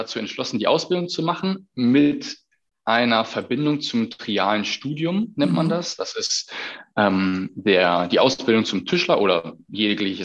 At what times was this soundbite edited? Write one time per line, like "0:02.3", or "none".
none